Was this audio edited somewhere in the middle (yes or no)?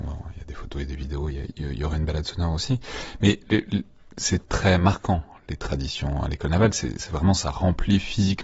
no